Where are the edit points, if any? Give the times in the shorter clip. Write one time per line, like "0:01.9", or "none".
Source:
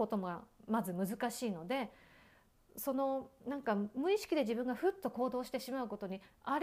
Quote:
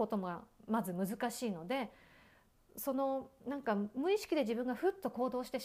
none